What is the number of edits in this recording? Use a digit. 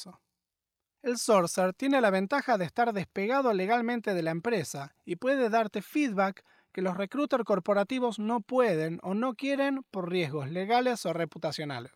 0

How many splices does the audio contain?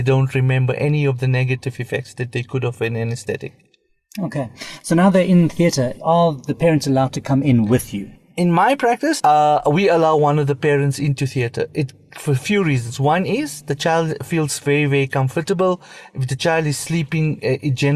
1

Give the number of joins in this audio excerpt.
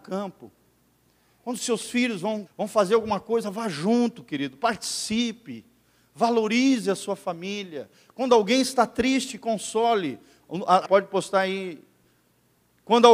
2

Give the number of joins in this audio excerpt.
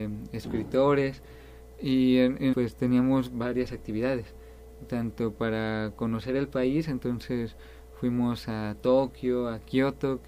1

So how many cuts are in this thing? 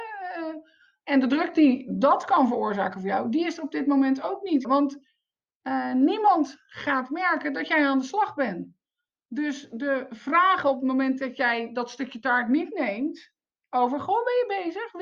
1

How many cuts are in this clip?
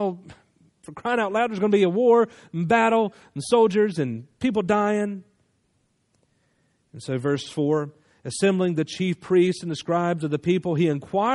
0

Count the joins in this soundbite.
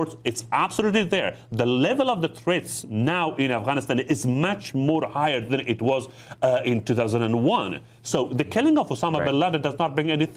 0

